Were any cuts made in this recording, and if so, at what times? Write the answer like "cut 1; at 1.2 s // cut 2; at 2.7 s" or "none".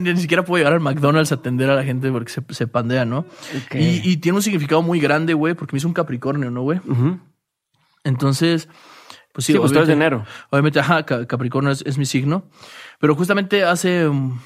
none